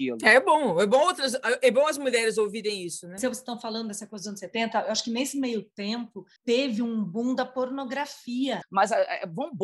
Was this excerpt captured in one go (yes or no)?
no